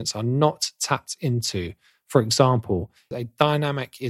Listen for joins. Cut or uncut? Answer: cut